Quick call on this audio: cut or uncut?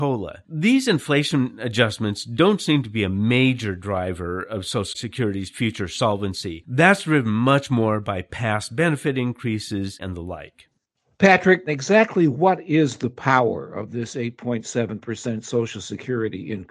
cut